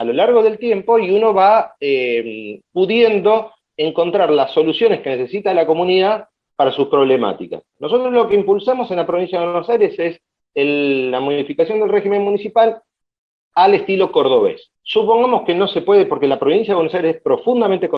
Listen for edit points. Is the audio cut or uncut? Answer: uncut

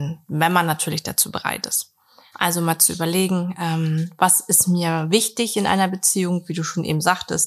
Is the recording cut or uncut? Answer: cut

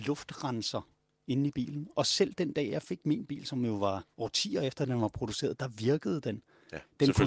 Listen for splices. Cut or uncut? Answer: cut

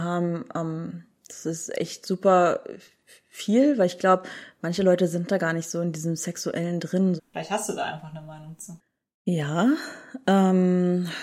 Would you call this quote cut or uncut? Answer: cut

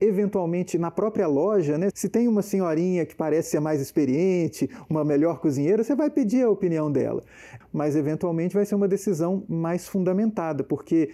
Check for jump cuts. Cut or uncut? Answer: cut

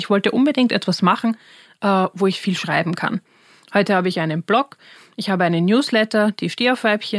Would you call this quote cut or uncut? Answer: uncut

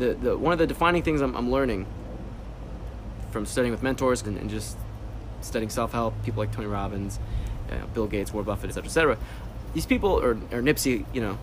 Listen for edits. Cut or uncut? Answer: cut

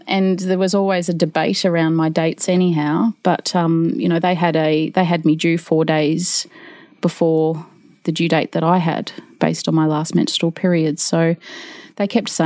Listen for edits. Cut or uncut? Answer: uncut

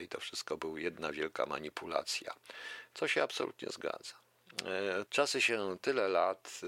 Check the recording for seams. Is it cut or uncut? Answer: cut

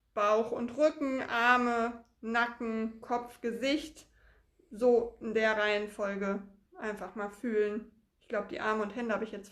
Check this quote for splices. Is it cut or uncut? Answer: uncut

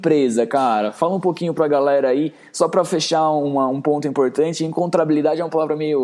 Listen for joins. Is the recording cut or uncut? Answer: uncut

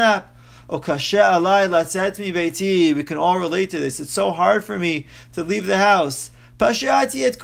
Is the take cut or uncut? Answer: uncut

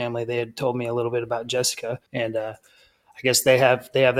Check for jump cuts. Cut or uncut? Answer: cut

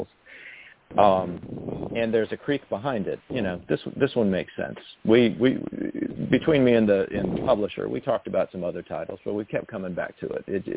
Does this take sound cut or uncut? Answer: cut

